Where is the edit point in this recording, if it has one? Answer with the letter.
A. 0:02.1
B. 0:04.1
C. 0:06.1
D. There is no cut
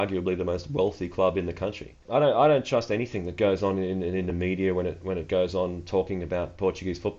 A